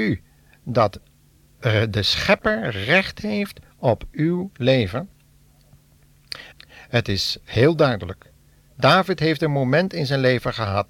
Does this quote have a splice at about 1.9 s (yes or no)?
no